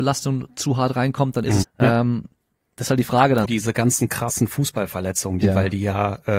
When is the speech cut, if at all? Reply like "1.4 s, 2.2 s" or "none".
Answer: 1.6 s, 3.4 s, 5.4 s